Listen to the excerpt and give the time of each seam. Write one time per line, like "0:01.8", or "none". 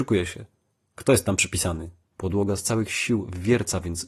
0:02.0

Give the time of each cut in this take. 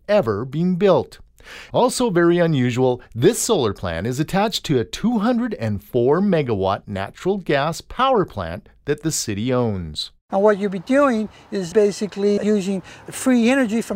0:12.4

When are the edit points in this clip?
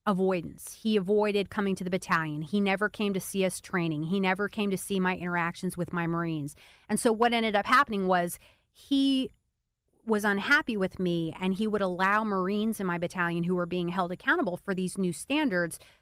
none

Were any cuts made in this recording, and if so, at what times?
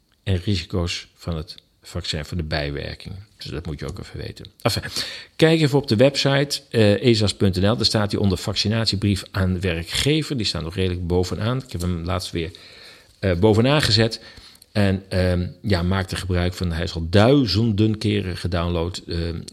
none

